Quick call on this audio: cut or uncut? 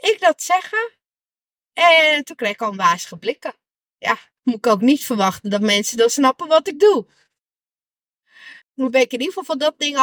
cut